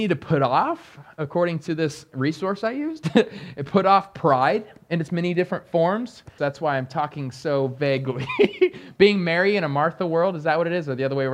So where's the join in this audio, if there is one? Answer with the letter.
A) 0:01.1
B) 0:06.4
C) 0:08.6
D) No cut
B